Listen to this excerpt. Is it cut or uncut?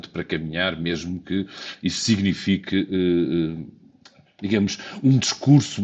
uncut